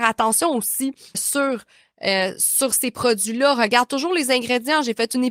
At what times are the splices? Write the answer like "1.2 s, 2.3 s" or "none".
1.1 s